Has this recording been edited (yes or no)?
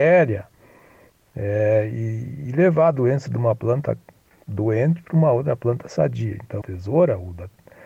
yes